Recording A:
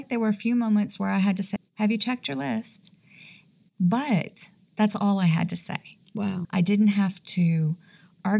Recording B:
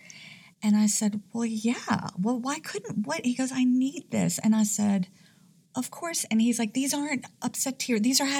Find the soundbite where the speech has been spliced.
A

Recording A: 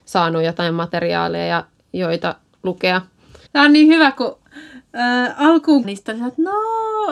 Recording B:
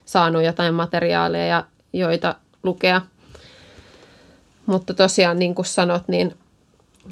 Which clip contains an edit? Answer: A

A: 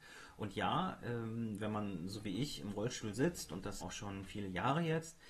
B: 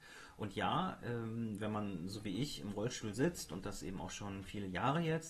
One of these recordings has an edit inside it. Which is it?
A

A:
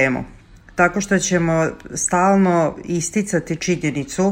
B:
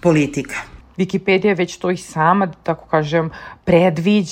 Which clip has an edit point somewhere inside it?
B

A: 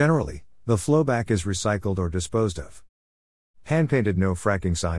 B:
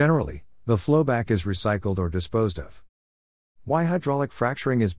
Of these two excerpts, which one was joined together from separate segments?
B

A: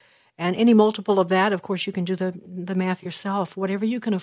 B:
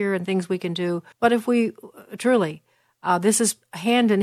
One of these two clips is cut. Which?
B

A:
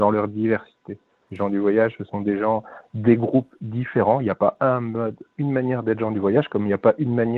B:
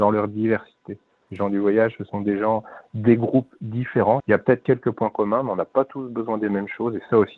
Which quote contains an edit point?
B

